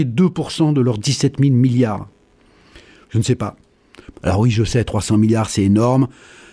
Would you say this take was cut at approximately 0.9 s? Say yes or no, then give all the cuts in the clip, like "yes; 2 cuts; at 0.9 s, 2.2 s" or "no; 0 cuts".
no; 2 cuts; at 3.0 s, 4.1 s